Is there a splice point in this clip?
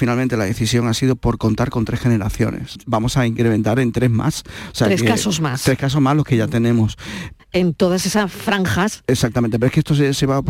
yes; 2 cuts; at 2.8 s, 7.4 s

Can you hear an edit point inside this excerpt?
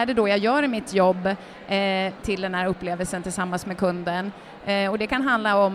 yes; 1 cut; at 2.2 s

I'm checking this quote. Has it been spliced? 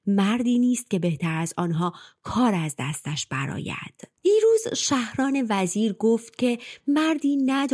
no; 0 cuts

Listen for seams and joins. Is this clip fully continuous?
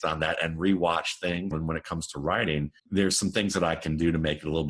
no; 2 cuts; at 1.5 s, 2.8 s

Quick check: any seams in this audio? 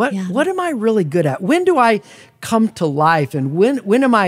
no; 0 cuts

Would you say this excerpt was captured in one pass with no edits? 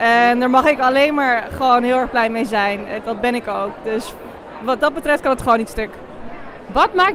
no; 1 cut; at 3.0 s

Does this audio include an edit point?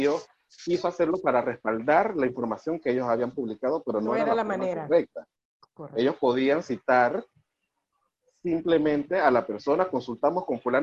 no; 0 cuts

